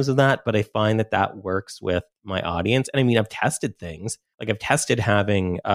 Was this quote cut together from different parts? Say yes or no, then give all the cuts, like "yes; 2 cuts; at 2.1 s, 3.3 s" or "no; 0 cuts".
no; 0 cuts